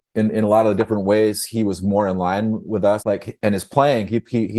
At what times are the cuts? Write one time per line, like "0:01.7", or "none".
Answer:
0:03.0